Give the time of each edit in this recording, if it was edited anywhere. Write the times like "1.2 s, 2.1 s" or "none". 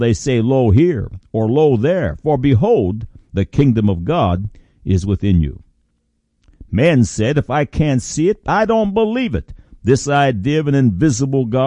none